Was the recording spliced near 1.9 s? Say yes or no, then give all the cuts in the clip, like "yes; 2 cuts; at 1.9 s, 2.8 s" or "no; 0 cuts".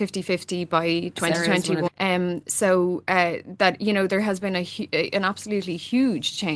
yes; 1 cut; at 1.9 s